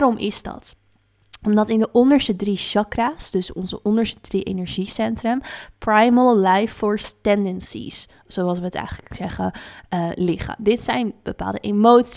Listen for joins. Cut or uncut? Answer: uncut